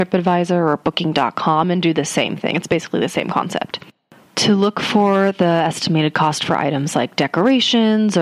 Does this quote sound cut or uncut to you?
uncut